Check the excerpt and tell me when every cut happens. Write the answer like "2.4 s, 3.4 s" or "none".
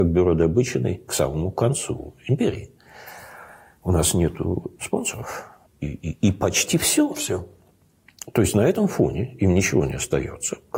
5.7 s